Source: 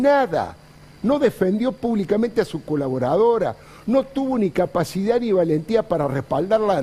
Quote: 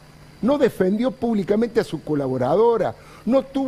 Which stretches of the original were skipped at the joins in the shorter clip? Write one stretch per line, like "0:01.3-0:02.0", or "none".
none